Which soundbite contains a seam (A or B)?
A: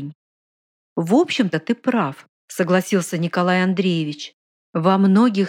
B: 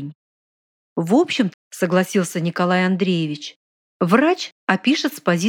B